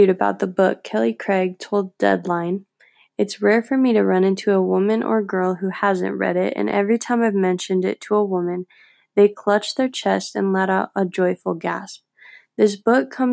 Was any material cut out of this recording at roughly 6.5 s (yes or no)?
no